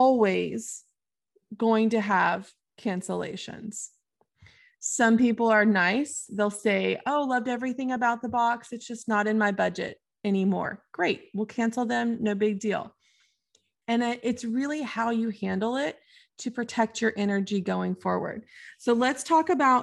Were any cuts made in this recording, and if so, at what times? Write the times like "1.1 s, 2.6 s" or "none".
13.8 s